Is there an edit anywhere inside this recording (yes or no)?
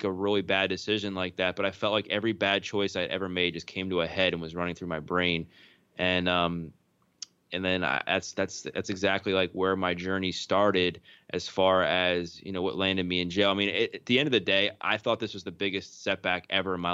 no